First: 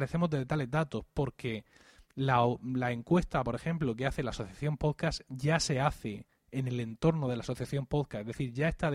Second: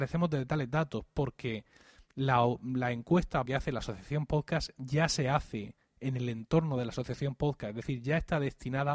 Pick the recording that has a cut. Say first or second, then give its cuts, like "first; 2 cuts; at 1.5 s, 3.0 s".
second; 1 cut; at 3.5 s